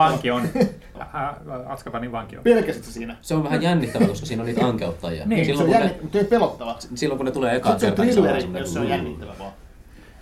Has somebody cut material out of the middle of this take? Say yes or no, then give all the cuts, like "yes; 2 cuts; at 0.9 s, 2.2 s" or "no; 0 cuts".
yes; 1 cut; at 0.9 s